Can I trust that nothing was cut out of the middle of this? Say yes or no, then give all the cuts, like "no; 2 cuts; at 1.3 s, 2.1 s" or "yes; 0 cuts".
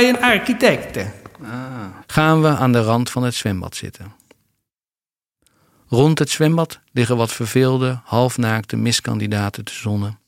no; 1 cut; at 2.0 s